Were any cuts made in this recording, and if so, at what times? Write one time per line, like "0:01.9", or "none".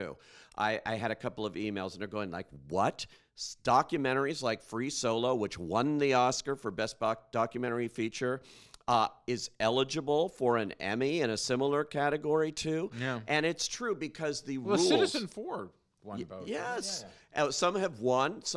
none

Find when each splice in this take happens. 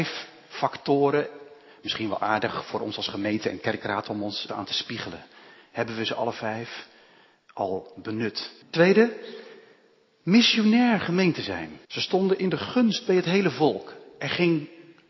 0:04.5
0:08.6
0:11.8

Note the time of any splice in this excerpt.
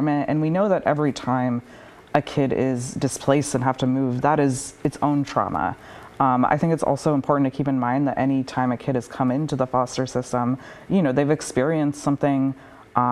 none

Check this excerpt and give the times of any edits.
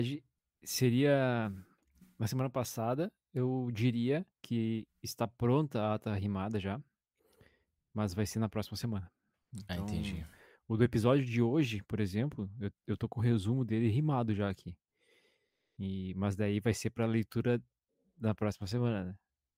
0:04.3

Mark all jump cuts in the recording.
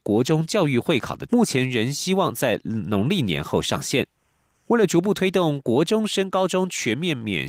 0:01.3
0:04.7

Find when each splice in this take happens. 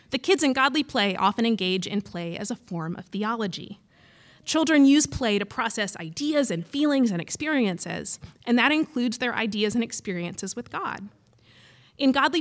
none

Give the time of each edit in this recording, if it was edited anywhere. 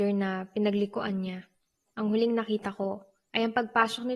0:01.9

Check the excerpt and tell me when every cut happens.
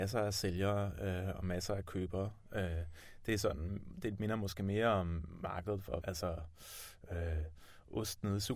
0:02.5
0:06.0

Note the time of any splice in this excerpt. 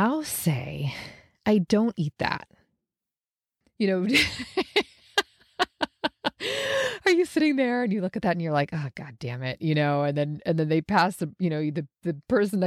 0:03.6

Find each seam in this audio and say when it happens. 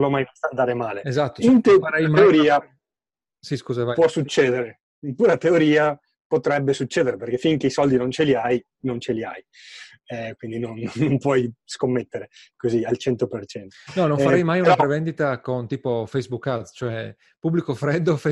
none

